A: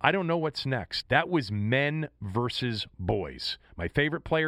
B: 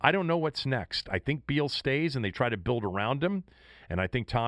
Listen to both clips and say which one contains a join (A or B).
A